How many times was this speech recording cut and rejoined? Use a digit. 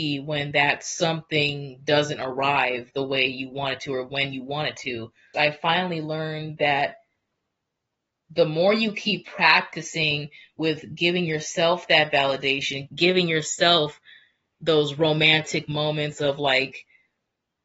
2